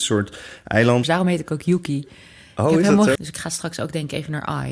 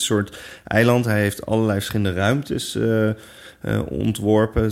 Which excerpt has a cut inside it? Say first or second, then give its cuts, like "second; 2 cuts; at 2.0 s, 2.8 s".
first; 2 cuts; at 1.0 s, 3.2 s